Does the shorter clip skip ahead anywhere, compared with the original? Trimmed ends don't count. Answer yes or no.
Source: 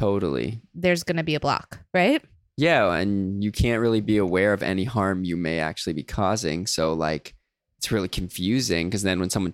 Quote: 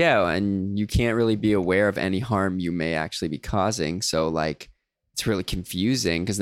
no